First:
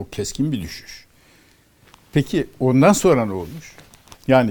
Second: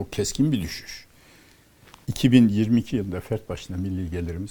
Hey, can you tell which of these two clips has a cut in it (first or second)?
second